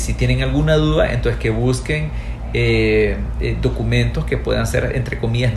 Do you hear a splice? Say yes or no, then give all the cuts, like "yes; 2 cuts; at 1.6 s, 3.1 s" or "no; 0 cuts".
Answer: no; 0 cuts